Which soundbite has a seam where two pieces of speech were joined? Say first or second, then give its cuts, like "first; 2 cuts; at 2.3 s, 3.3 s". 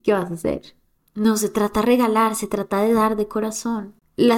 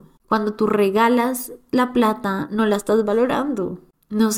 first; 1 cut; at 1.0 s